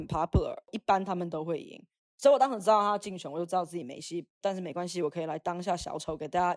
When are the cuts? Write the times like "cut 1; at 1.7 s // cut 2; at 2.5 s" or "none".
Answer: none